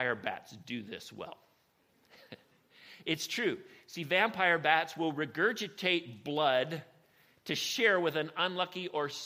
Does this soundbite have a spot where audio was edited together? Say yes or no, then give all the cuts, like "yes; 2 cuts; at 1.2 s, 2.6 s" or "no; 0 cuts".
no; 0 cuts